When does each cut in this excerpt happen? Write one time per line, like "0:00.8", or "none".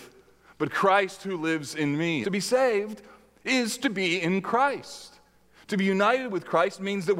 0:02.2